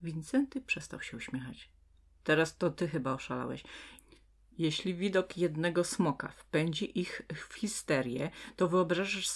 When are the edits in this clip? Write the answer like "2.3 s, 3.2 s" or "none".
none